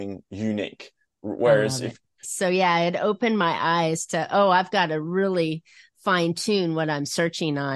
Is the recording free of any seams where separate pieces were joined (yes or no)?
no